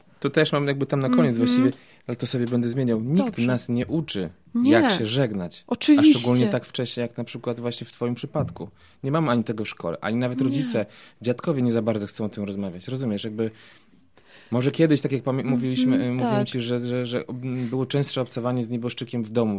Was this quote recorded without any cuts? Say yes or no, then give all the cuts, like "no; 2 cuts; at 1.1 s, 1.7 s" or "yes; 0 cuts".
yes; 0 cuts